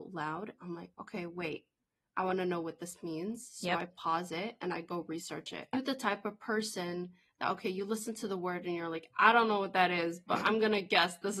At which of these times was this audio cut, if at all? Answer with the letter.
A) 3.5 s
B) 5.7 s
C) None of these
B